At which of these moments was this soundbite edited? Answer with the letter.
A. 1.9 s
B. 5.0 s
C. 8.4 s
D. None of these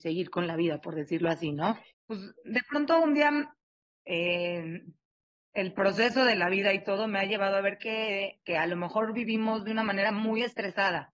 A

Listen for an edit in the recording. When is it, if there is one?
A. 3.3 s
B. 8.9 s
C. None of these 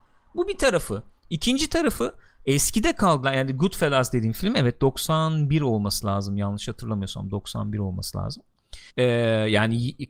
B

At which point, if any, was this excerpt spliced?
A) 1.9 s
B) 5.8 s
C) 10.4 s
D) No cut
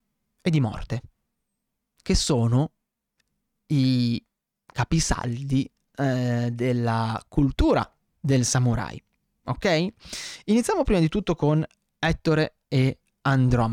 D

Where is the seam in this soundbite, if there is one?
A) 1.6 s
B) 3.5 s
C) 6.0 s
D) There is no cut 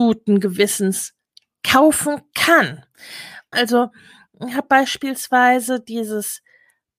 B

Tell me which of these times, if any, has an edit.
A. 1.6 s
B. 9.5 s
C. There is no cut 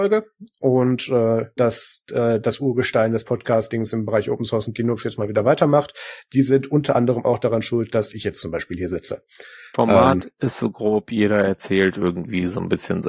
A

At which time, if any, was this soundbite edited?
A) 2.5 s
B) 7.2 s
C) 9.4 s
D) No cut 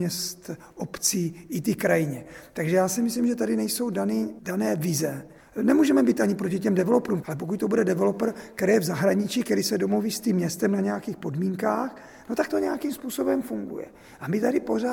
B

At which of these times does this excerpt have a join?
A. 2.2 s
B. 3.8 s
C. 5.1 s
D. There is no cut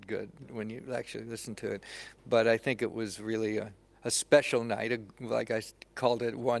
D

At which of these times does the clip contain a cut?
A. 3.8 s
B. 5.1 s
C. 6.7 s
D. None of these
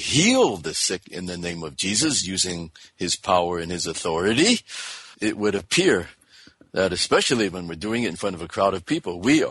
B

